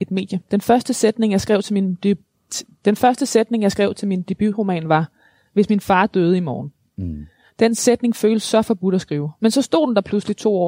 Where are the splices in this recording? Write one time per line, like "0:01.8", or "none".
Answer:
0:09.4

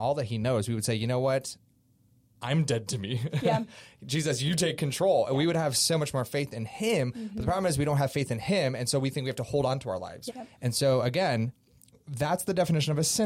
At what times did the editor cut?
0:10.3

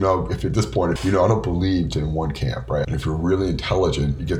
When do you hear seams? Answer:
0:01.0
0:02.8

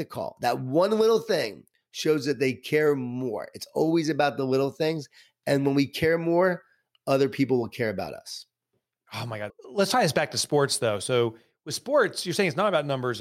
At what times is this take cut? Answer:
0:09.5

